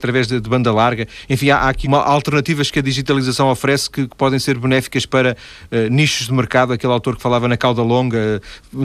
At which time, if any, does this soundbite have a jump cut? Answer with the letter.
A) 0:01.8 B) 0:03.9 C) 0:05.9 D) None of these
A